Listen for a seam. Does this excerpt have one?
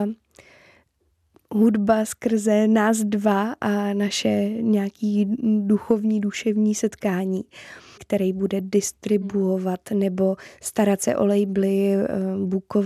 yes; 1 cut; at 8.0 s

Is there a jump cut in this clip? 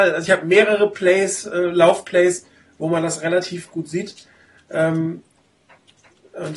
no; 0 cuts

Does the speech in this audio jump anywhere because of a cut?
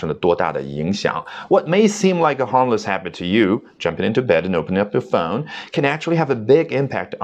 no; 0 cuts

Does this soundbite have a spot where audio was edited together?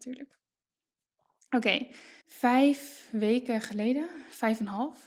yes; 1 cut; at 2.2 s

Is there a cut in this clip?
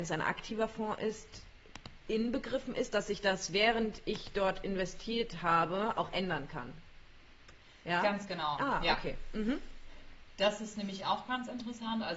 no; 0 cuts

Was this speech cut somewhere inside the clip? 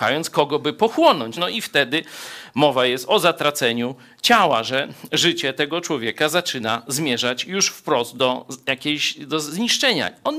yes; 1 cut; at 1.4 s

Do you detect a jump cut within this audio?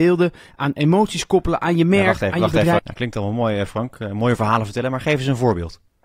yes; 1 cut; at 2.8 s

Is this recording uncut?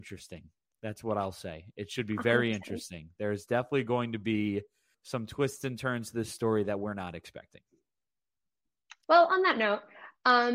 no; 2 cuts; at 4.9 s, 9.0 s

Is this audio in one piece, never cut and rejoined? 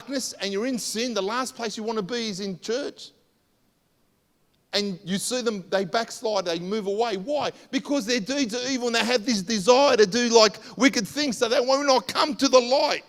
yes; 0 cuts

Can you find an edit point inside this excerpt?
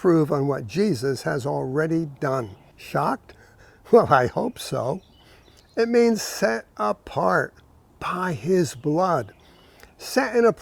yes; 2 cuts; at 2.7 s, 5.6 s

